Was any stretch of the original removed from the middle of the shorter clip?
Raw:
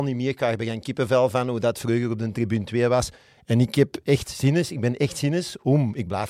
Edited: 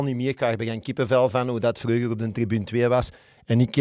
no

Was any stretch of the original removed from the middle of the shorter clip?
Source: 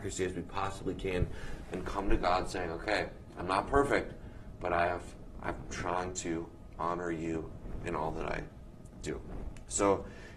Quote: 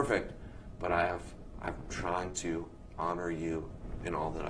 no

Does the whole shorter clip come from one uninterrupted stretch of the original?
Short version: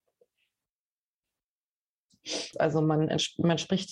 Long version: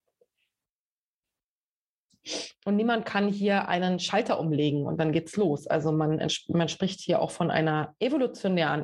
no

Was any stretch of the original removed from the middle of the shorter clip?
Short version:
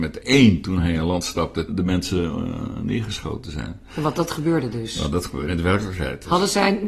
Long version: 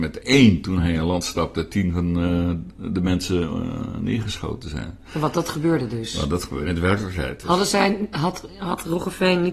yes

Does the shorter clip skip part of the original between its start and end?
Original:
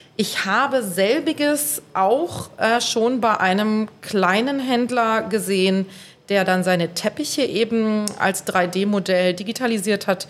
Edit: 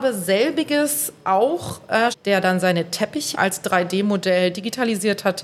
yes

